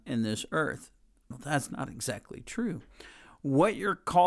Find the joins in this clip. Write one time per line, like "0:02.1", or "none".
0:01.3